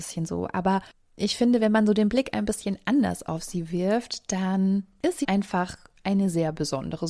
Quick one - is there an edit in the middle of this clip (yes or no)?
yes